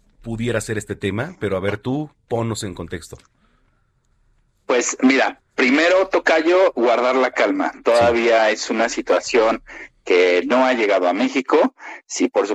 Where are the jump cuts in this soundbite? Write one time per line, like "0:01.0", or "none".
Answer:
none